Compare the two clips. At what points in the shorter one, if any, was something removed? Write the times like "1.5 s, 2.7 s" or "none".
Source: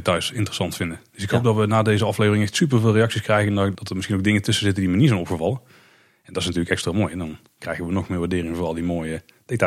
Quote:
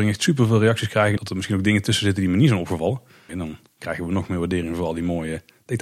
1.2 s, 3.3 s